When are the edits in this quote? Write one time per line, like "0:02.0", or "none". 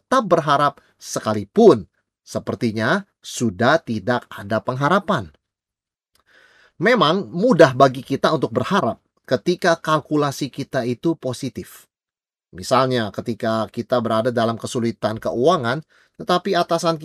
none